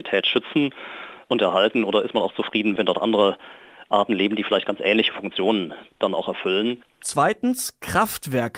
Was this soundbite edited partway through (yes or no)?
no